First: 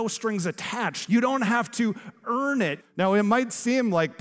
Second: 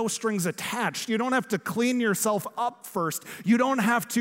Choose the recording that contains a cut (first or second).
first